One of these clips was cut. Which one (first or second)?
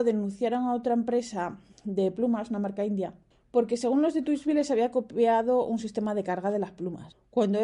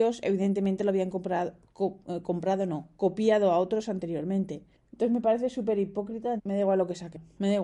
second